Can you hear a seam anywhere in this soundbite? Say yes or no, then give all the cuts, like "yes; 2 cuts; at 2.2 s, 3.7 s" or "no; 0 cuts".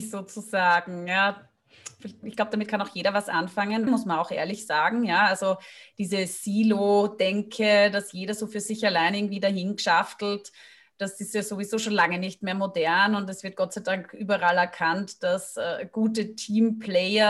yes; 2 cuts; at 2.2 s, 3.9 s